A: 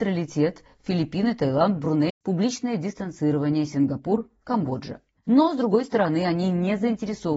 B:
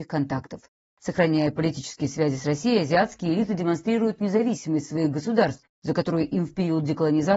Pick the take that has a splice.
A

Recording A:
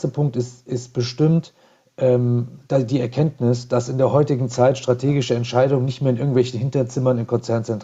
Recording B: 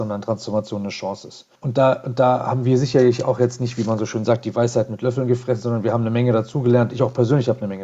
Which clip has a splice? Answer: B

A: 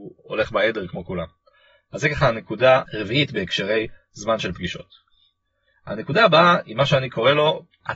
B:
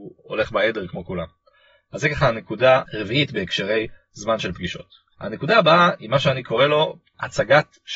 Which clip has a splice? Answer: B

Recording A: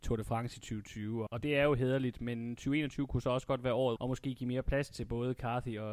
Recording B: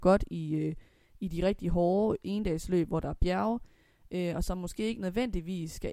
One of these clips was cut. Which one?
A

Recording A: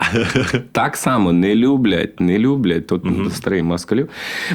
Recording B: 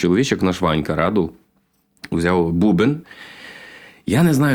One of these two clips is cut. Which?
B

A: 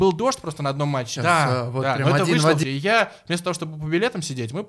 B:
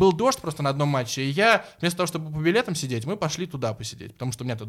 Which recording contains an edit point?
A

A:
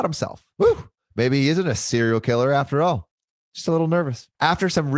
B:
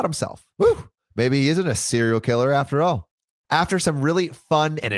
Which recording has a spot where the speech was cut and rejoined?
B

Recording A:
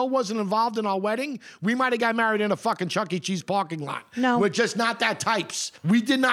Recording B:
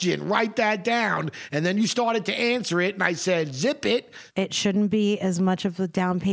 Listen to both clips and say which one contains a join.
B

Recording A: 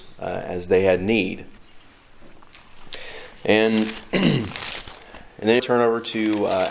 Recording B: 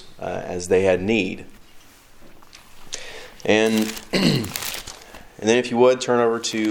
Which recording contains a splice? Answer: A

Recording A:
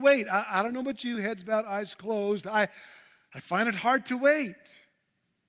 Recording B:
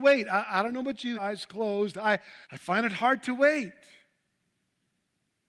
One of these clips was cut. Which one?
B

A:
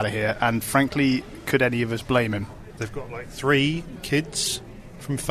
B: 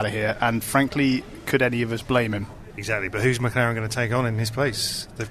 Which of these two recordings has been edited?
A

